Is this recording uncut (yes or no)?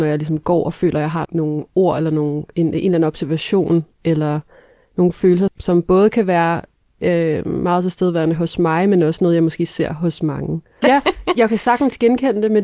no